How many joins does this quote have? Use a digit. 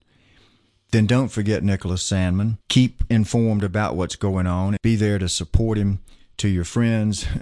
2